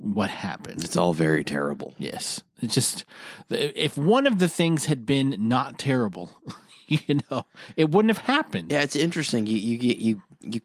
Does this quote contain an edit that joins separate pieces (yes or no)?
no